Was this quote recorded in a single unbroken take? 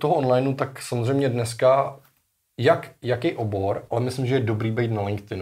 yes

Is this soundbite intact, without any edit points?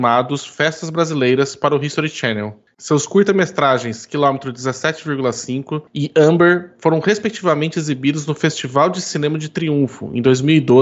yes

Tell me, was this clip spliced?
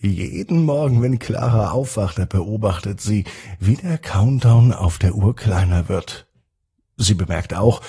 no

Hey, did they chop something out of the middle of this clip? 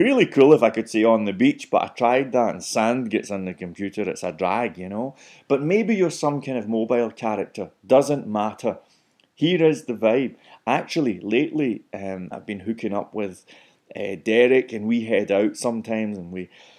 no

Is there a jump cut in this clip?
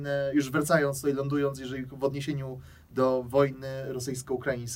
no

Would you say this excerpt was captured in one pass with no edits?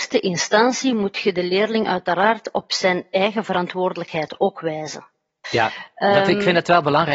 no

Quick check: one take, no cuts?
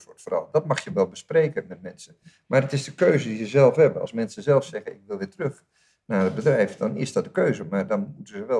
yes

